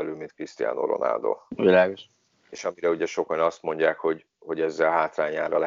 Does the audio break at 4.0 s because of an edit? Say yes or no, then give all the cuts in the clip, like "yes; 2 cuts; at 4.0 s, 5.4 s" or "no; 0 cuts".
no; 1 cut; at 2.3 s